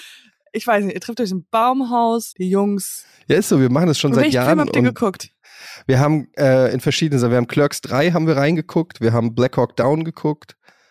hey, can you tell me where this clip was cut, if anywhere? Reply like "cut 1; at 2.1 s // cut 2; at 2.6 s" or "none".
cut 1; at 2.3 s